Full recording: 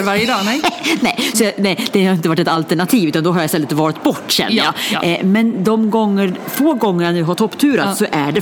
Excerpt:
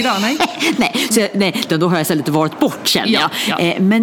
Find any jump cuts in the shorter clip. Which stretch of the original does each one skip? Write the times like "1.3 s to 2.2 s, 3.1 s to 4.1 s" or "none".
1.9 s to 3.1 s